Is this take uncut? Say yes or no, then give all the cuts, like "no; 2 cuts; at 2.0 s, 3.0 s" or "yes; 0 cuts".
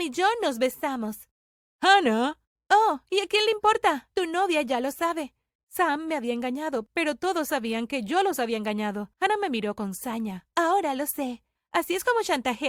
no; 2 cuts; at 5.6 s, 9.1 s